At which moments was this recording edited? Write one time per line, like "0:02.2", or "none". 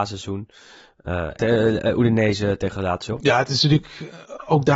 0:01.3
0:03.2